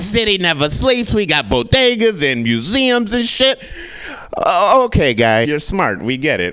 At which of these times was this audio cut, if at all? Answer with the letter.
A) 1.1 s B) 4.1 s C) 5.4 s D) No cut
C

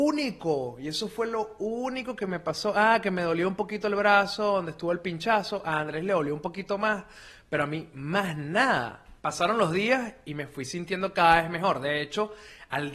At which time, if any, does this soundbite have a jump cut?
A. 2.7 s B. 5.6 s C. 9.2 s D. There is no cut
C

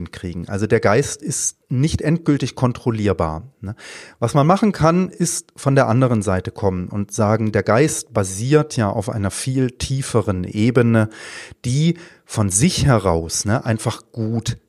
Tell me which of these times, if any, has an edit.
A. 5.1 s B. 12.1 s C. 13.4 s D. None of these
D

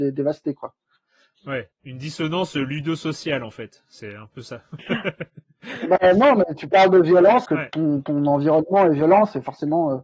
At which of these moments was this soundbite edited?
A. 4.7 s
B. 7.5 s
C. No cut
B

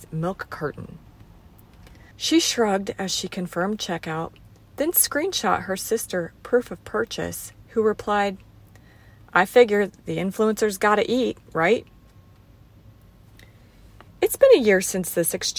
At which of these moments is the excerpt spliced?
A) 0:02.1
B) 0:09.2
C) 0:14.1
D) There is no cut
A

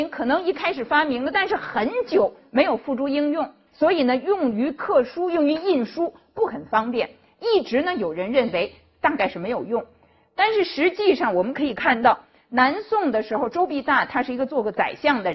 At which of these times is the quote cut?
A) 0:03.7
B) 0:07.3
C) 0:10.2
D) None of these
A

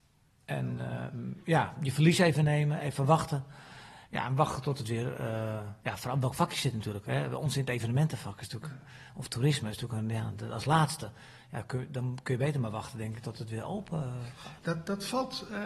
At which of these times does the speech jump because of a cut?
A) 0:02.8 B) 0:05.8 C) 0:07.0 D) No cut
B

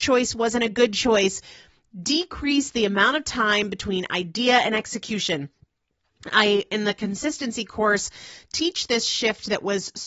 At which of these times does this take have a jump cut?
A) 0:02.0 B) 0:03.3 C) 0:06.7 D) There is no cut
D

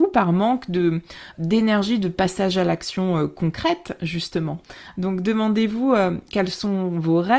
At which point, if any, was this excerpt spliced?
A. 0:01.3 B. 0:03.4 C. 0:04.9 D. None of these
A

